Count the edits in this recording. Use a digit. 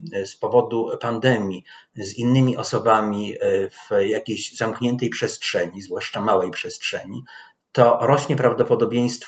0